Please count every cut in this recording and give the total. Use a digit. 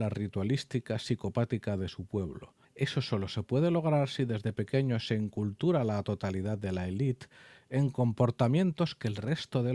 1